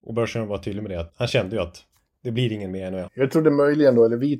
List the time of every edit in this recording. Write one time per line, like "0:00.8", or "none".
0:01.1
0:03.1